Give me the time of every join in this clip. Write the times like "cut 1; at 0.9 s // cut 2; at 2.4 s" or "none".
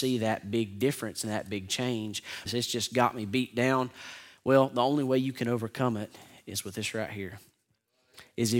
cut 1; at 2.5 s